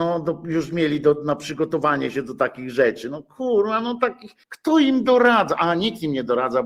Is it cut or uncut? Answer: cut